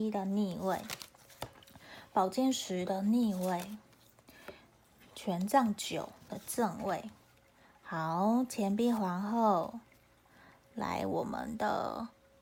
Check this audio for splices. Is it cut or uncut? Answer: uncut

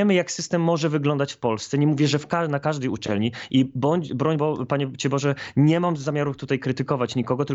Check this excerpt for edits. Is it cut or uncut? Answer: uncut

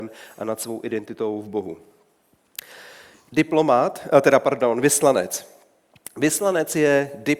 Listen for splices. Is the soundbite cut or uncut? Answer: cut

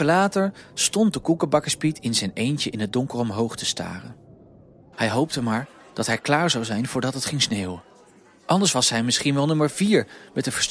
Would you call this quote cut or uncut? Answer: cut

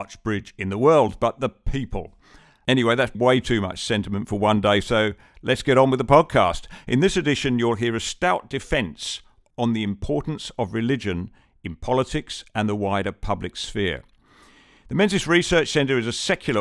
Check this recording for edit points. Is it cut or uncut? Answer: cut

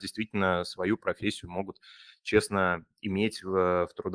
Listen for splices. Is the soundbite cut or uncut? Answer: uncut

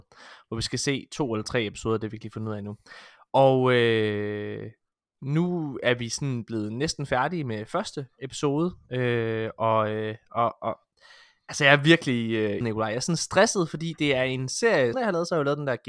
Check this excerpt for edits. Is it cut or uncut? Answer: cut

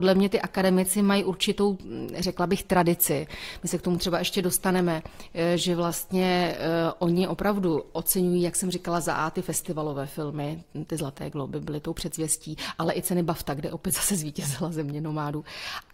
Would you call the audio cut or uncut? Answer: uncut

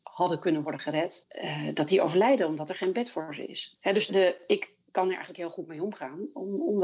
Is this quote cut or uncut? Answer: cut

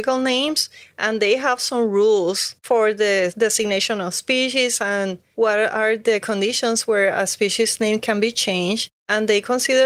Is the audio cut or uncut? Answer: uncut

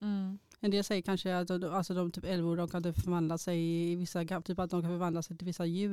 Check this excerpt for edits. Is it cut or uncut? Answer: cut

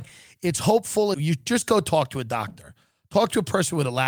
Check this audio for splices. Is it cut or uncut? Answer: cut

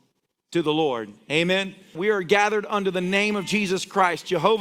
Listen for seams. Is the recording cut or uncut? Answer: cut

